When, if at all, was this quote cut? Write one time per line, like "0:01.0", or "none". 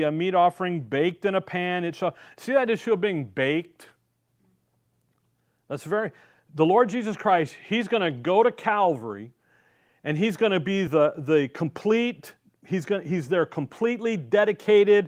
none

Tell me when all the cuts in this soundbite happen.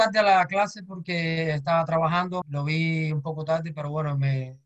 0:02.4

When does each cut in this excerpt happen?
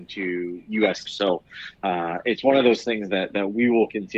0:01.1

